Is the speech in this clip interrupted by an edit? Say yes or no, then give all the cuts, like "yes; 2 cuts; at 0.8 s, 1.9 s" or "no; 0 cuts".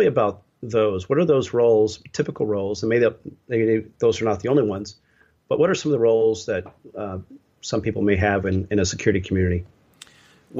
no; 0 cuts